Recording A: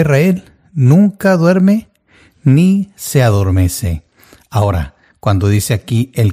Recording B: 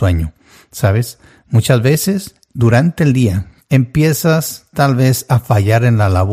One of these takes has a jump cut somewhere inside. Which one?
B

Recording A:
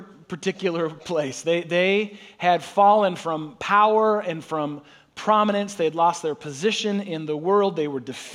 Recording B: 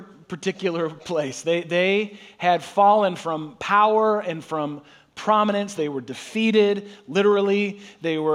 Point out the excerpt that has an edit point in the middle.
B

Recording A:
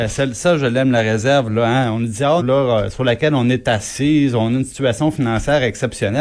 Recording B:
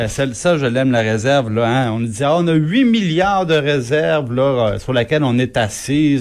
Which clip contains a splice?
A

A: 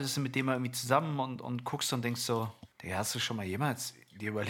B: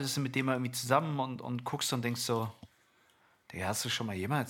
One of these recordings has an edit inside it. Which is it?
A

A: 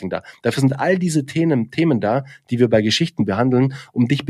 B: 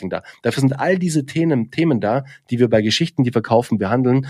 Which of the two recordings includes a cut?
A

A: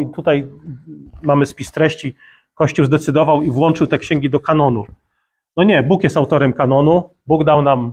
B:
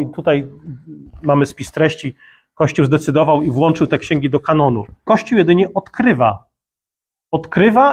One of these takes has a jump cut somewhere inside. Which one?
B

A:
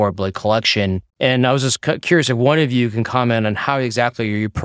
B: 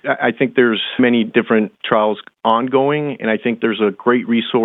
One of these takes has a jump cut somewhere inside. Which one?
A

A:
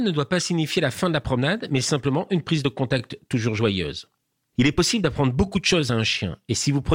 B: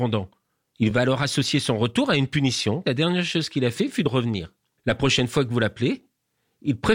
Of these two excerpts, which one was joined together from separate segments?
B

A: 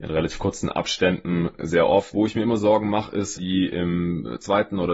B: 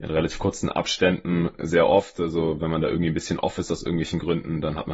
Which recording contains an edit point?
A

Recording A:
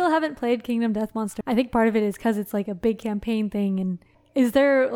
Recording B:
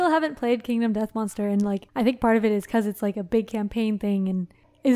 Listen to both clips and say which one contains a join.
A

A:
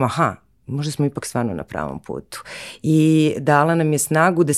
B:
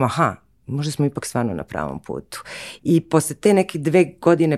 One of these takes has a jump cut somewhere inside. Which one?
B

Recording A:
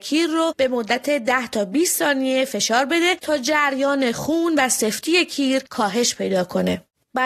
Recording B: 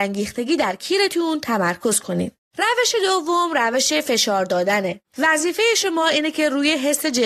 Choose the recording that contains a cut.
B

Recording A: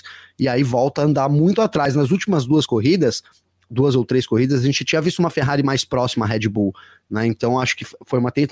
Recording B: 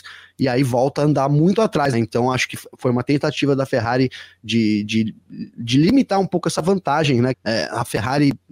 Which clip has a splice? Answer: B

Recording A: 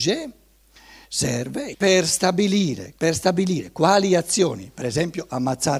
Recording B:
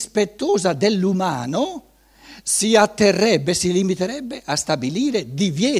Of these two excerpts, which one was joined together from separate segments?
A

